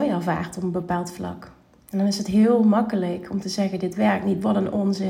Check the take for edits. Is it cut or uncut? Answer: uncut